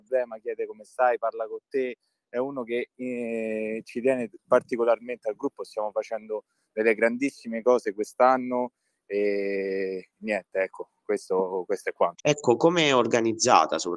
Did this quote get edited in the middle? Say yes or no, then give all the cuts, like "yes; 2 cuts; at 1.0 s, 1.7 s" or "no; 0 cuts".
yes; 1 cut; at 12.2 s